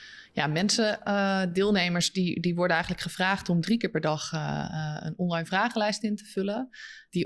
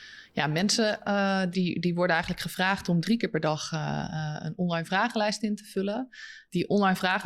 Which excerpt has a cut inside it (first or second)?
second